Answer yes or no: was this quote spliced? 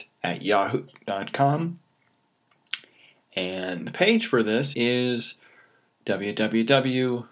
yes